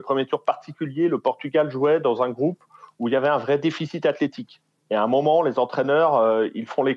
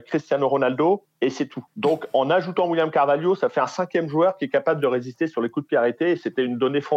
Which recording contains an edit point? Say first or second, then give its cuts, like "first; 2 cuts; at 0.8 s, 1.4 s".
second; 1 cut; at 1.7 s